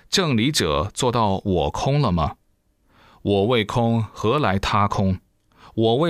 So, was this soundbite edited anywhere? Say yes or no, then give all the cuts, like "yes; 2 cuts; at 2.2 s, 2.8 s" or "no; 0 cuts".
no; 0 cuts